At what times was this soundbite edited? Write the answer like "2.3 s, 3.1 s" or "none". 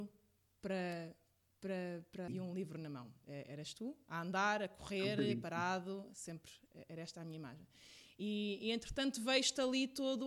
2.3 s

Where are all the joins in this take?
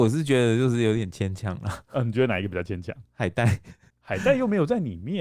none

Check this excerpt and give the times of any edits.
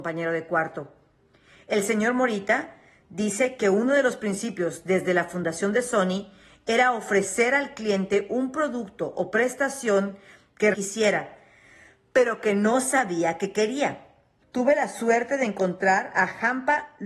10.7 s, 14.4 s

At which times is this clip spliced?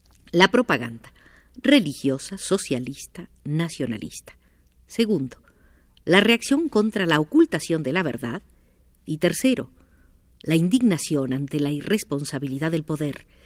none

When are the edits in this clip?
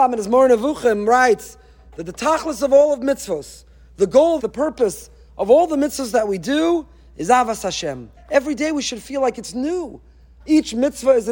4.4 s, 8.2 s, 10.4 s

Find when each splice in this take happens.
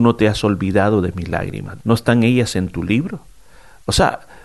1.8 s

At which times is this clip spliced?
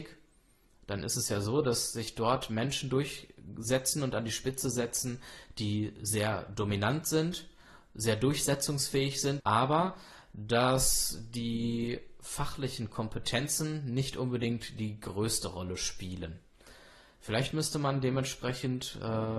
9.4 s

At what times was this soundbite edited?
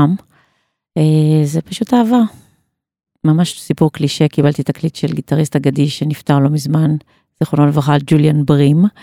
3.1 s

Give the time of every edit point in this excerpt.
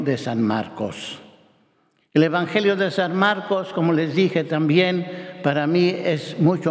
none

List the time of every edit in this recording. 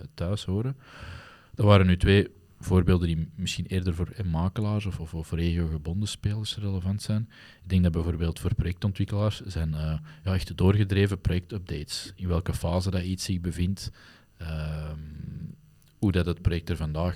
none

